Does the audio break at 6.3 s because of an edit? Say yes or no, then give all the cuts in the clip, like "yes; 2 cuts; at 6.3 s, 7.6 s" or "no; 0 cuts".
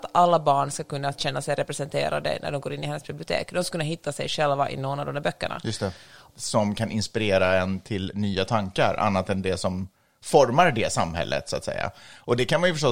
yes; 1 cut; at 6.3 s